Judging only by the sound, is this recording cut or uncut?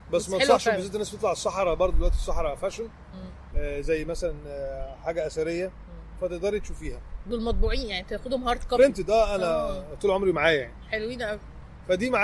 cut